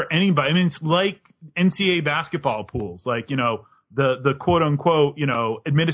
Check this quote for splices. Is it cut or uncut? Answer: uncut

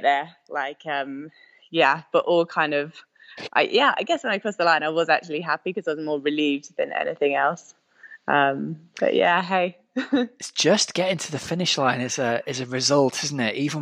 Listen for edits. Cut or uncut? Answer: uncut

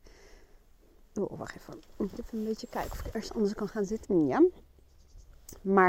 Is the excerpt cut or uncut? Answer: cut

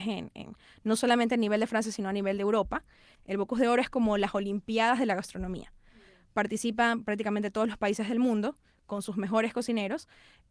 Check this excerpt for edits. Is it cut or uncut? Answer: cut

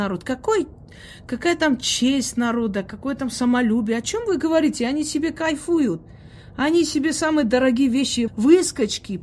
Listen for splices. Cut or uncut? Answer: cut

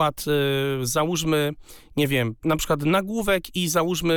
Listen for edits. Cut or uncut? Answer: cut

